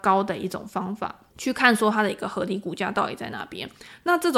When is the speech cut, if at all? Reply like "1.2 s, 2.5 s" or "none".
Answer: 1.3 s